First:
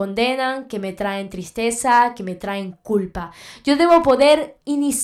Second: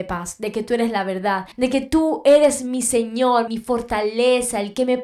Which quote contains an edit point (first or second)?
second